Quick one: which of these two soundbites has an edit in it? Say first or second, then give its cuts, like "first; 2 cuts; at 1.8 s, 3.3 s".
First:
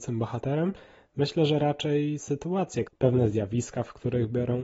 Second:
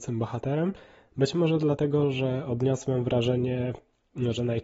first; 2 cuts; at 1.0 s, 2.8 s